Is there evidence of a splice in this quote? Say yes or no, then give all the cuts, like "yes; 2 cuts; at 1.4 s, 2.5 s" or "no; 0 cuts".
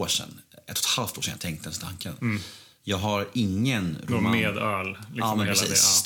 no; 0 cuts